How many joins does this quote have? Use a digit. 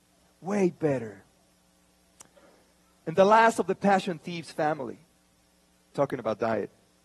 1